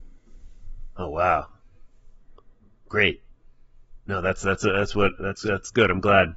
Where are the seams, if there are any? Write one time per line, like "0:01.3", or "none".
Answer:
none